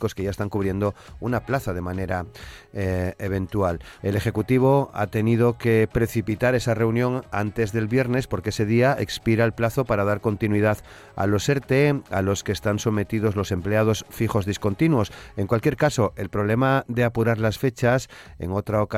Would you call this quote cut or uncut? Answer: cut